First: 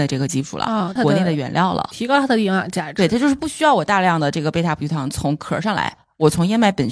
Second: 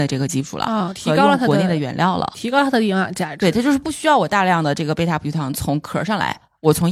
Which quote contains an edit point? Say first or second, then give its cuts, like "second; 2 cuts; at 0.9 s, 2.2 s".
first; 1 cut; at 1.0 s